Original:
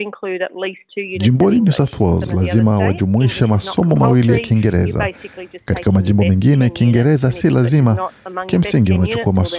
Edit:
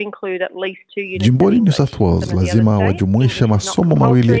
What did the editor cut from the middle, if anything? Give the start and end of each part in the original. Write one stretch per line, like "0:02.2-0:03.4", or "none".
none